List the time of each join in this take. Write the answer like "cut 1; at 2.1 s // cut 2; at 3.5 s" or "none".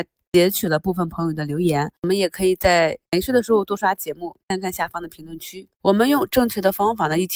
cut 1; at 3.8 s